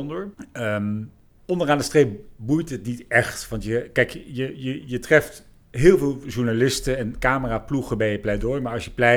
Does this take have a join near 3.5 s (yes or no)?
no